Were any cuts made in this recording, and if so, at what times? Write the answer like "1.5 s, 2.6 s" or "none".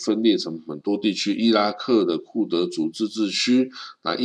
none